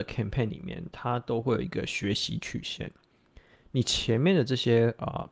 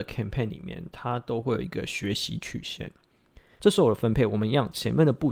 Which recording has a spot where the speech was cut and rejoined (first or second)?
second